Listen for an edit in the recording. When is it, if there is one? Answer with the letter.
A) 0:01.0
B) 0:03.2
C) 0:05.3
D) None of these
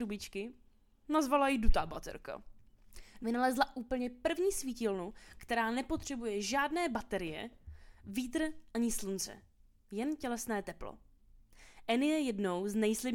B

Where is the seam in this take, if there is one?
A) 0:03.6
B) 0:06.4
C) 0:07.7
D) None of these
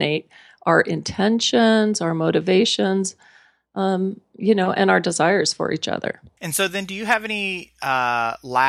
B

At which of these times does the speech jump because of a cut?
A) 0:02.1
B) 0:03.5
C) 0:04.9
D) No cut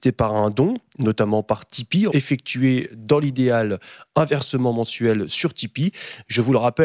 A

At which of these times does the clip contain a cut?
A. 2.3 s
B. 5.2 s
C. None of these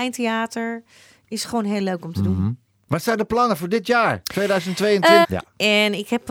B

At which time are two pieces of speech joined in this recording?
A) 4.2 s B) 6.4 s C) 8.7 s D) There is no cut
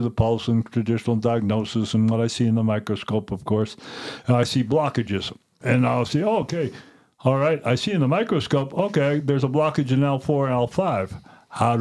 D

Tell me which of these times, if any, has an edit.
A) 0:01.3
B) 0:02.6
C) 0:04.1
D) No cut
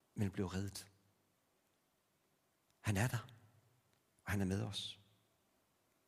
B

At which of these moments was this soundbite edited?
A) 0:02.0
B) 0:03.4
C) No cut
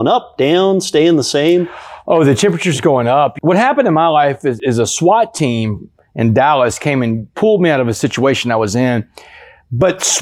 C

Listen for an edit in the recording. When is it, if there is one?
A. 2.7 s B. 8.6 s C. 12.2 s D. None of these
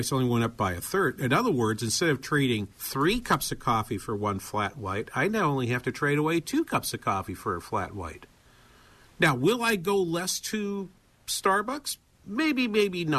A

